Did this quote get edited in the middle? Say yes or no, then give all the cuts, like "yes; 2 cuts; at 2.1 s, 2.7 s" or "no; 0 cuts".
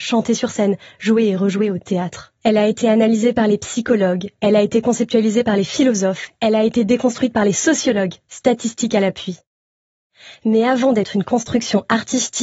yes; 1 cut; at 2.4 s